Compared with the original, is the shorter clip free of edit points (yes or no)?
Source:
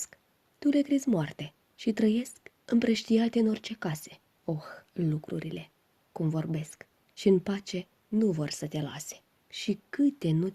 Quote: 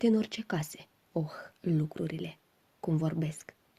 yes